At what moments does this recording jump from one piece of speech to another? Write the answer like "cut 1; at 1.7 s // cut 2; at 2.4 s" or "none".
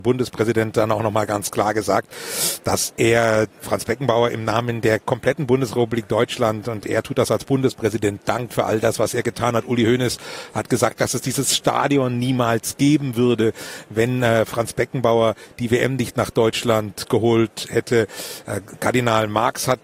none